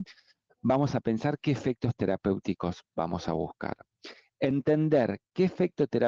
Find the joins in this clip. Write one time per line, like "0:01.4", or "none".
none

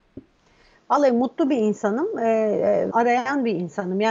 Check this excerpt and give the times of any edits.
0:02.9

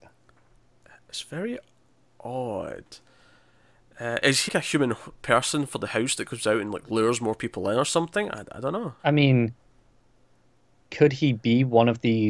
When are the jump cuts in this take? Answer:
0:04.5
0:09.0

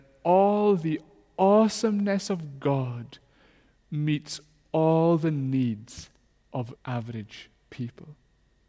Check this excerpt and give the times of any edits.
0:06.8

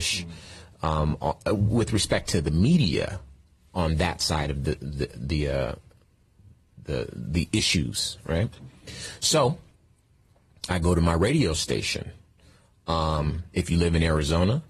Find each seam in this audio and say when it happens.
none

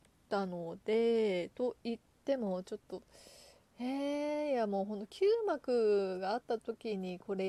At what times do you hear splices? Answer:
0:06.4

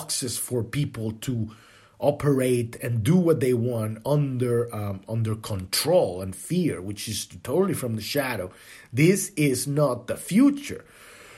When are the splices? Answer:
none

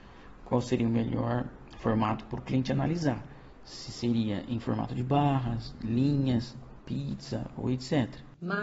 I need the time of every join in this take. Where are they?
none

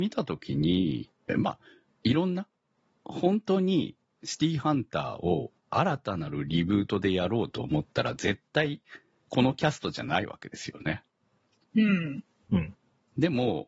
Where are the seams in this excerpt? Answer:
0:01.3
0:02.9

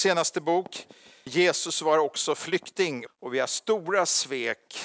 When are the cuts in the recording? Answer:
0:01.3
0:03.1

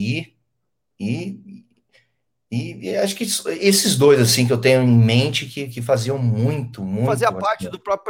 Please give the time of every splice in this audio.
none

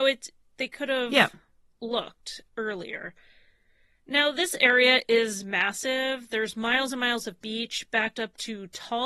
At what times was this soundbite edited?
none

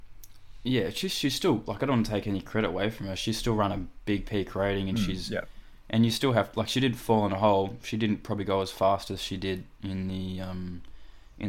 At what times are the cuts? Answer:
none

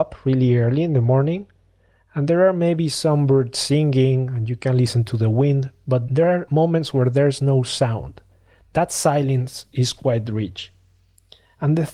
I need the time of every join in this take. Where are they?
none

